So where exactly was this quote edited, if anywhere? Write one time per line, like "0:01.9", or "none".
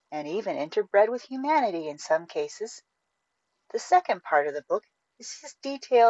none